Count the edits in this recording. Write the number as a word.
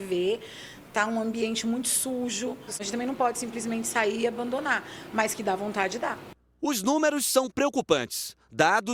one